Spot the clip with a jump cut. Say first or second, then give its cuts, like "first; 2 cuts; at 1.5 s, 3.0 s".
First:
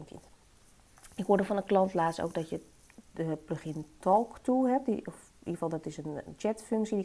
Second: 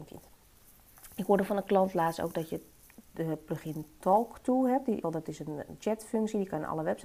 second; 1 cut; at 5.0 s